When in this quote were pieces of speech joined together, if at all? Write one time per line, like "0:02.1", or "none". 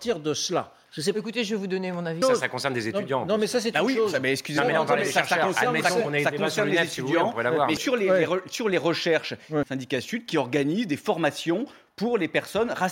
0:02.2
0:07.8
0:09.6